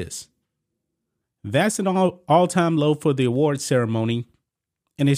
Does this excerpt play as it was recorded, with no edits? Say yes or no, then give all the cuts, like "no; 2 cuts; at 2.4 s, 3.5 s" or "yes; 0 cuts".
no; 1 cut; at 1.2 s